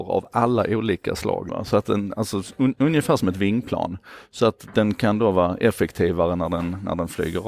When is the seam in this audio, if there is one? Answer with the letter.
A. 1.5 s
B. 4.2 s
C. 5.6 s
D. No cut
A